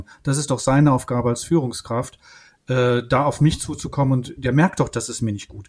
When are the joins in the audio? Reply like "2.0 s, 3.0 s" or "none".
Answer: none